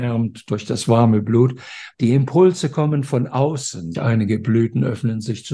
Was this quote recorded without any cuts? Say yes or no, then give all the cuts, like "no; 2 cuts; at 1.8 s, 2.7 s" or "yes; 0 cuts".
no; 2 cuts; at 1.9 s, 3.9 s